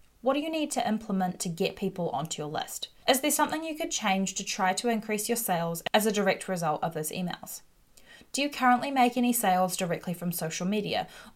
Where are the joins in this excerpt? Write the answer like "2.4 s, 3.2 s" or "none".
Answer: 3.0 s